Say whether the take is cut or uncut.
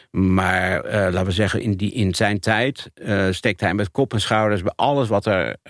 uncut